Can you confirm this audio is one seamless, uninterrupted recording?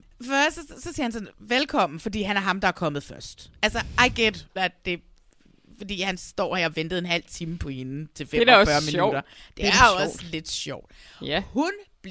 no; 1 cut; at 4.6 s

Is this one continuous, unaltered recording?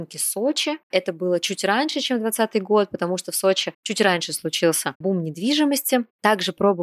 yes; 0 cuts

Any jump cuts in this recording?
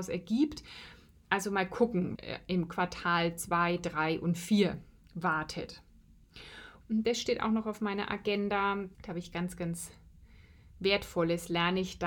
yes; 3 cuts; at 2.2 s, 6.8 s, 8.9 s

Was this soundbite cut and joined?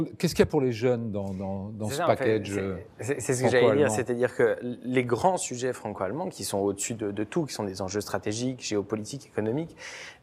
no; 0 cuts

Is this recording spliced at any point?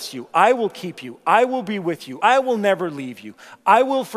no; 0 cuts

